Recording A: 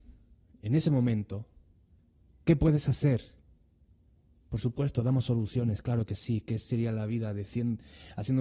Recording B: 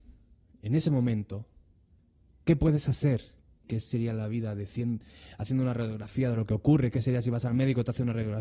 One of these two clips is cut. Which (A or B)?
B